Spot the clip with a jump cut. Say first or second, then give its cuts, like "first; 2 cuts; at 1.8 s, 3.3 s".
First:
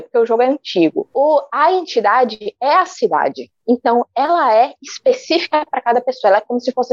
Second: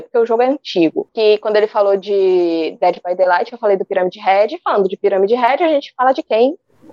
second; 1 cut; at 1.1 s